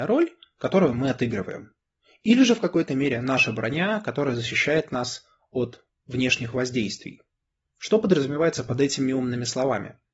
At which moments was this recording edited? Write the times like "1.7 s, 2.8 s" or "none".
7.6 s

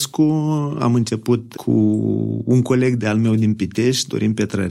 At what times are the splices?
1.5 s

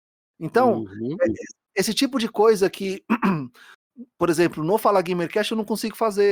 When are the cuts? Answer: none

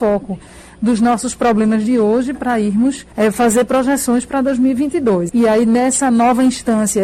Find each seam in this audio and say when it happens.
3.1 s, 5.3 s

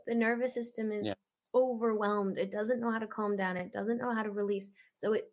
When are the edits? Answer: none

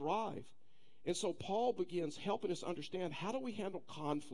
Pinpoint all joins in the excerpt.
none

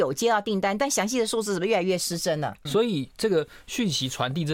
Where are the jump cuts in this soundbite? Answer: 2.7 s

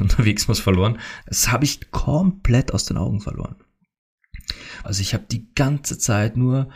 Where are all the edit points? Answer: 1.2 s, 4.8 s

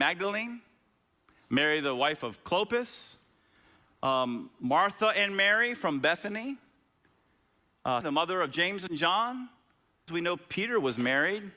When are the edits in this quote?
8.0 s, 10.1 s

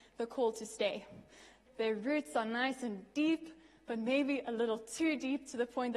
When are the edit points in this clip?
1.7 s

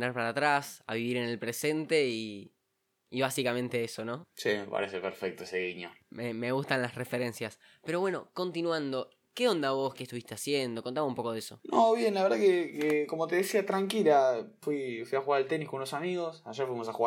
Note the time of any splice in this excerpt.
10.0 s

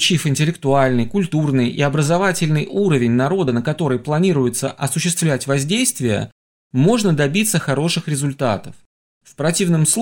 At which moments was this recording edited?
none

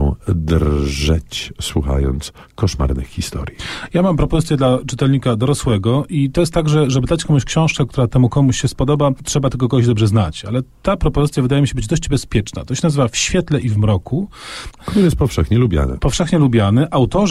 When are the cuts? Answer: 14.8 s

